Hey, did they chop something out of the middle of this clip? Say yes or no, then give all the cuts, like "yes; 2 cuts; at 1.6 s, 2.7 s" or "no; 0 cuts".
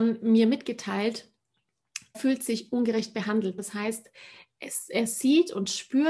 yes; 2 cuts; at 2.1 s, 3.6 s